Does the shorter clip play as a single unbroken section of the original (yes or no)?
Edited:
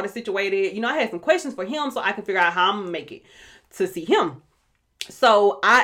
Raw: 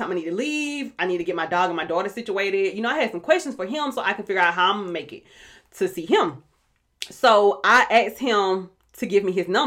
yes